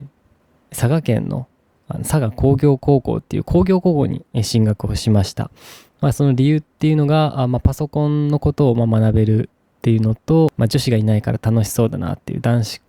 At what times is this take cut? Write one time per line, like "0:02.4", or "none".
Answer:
none